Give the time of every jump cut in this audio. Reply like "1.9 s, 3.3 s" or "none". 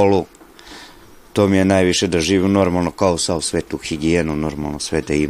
none